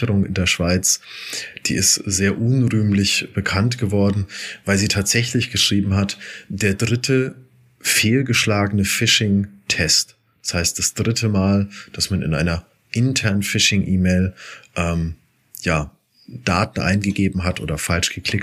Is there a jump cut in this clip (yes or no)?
no